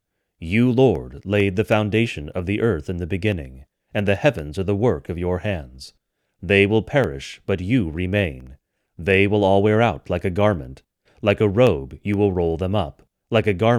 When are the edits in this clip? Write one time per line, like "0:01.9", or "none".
none